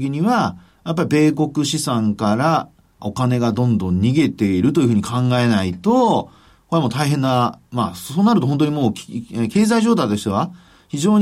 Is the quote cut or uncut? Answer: cut